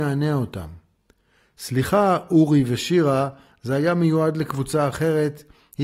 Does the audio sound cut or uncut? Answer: uncut